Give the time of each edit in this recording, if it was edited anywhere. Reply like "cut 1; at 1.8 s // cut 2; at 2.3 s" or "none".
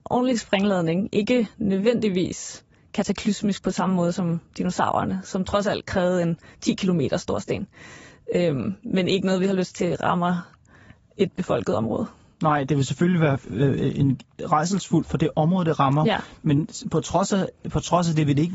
none